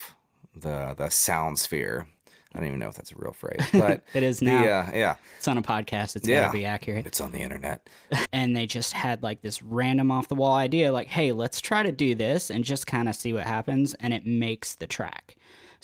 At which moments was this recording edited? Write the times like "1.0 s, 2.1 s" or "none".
7.0 s, 8.2 s